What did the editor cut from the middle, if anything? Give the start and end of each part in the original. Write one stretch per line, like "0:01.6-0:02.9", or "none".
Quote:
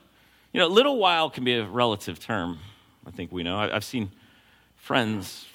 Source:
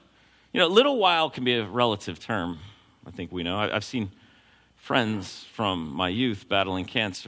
none